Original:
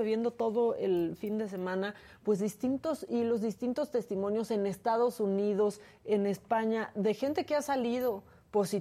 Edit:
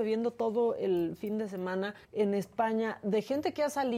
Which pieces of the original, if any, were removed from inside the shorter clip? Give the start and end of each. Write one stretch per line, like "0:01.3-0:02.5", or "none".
0:02.0-0:06.0